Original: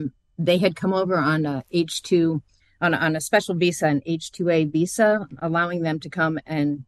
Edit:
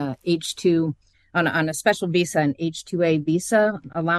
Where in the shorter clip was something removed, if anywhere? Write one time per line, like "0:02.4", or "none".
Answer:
none

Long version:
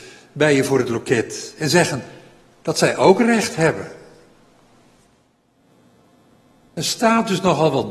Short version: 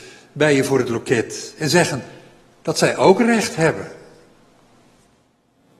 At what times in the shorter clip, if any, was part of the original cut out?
none

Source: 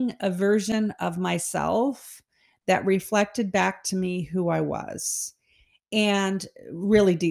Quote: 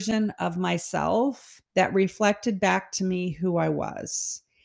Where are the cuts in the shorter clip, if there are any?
0:01.7

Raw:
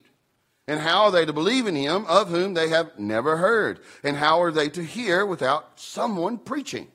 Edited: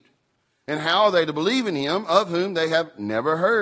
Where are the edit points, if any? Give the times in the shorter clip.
none

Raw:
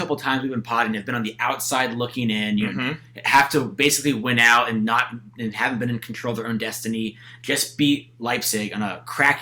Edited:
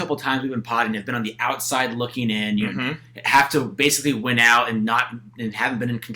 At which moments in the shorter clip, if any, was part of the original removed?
none

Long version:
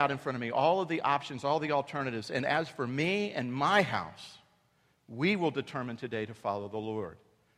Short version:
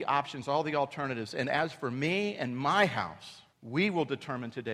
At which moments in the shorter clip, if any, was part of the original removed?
0:03.5

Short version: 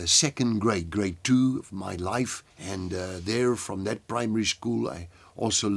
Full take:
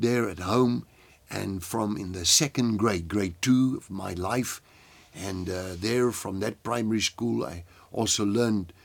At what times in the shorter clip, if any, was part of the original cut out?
0:02.5

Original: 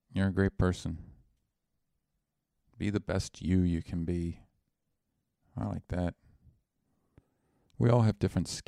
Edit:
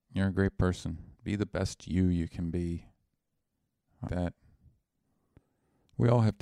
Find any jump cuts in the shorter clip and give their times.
0:01.1
0:04.1

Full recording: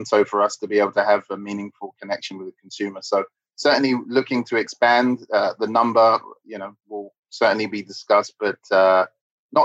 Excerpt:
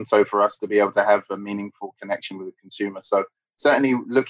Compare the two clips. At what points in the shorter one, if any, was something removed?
none

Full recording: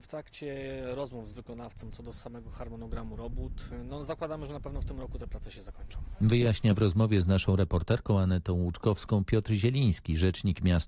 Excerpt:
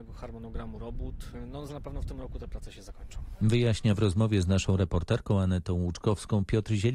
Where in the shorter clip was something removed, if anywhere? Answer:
0:01.7

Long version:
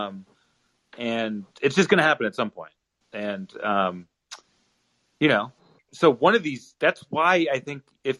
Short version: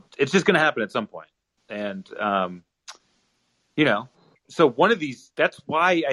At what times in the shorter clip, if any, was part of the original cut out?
none

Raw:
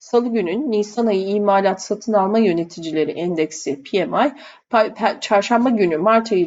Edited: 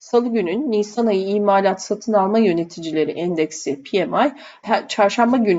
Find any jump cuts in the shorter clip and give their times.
0:04.6

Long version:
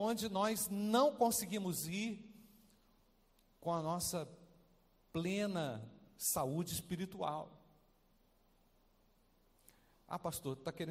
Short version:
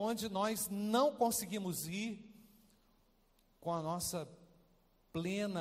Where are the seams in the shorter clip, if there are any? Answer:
none

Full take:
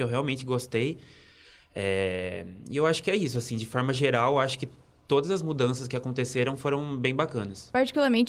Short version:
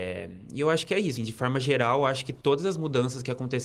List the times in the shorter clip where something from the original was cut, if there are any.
0:01.2
0:02.4

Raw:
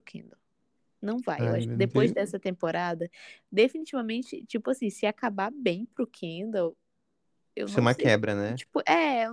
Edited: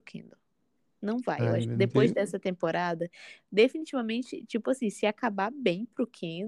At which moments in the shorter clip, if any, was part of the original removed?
none

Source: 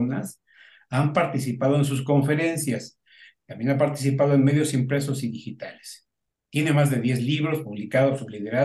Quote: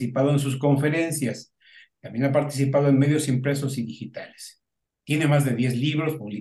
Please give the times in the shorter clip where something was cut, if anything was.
none

